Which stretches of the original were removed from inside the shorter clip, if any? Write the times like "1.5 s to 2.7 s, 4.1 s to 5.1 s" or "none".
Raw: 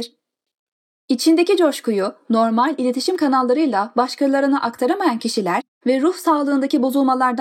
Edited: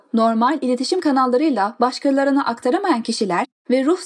none